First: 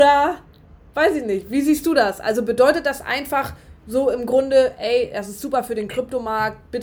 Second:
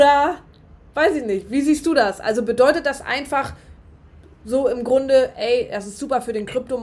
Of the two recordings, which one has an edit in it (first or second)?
first